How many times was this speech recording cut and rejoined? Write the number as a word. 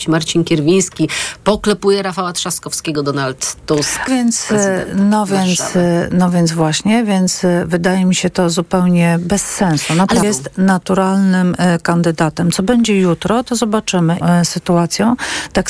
three